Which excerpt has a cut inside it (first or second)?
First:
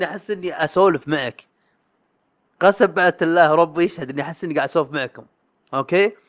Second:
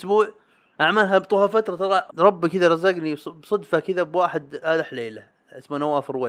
second